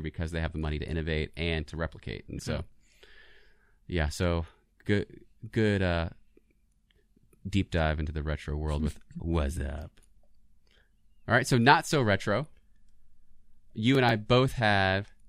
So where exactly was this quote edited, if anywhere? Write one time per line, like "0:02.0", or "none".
0:02.4
0:04.8